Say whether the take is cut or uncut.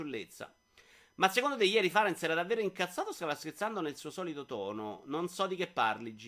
uncut